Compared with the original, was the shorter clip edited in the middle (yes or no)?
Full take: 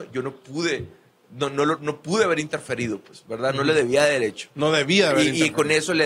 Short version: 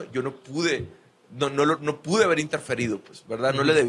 no